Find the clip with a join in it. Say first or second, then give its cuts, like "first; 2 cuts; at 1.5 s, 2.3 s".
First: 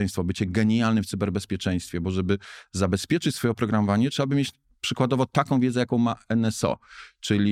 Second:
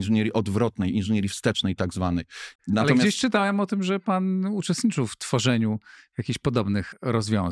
second; 1 cut; at 2.6 s